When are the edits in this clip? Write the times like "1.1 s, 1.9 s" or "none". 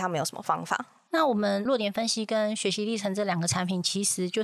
none